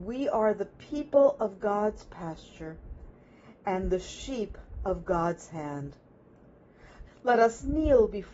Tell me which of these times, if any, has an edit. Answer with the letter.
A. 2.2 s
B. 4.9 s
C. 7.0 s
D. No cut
C